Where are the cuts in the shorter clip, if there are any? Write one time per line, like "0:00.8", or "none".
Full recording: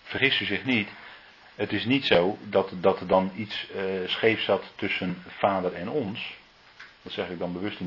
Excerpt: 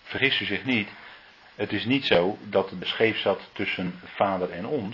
0:02.8